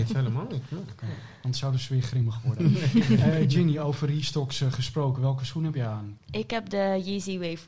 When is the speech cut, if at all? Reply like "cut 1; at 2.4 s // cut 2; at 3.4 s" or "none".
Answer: none